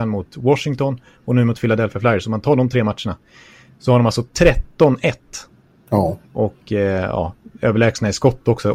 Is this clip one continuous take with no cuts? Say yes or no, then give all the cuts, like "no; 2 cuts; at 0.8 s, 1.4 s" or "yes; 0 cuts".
no; 1 cut; at 6.3 s